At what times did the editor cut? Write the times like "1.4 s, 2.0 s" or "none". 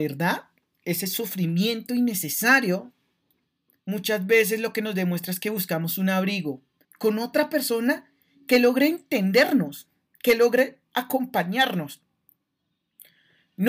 6.8 s